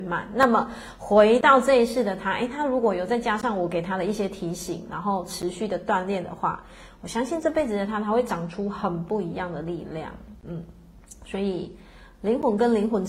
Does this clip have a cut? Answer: no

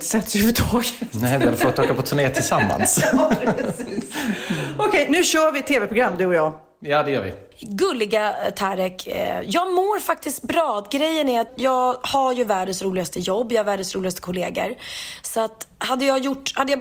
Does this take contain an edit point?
yes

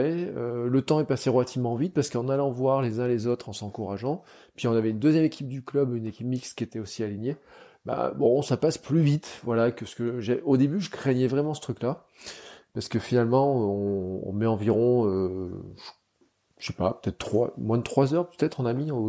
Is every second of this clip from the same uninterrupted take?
yes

